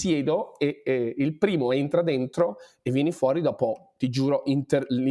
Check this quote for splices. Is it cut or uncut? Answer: uncut